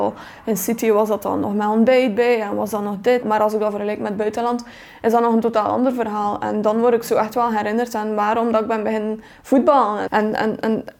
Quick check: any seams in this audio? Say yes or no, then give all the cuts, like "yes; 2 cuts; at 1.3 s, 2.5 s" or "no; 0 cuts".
yes; 2 cuts; at 3.2 s, 10.1 s